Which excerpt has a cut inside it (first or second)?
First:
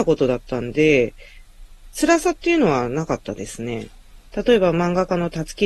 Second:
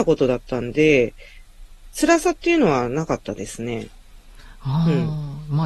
first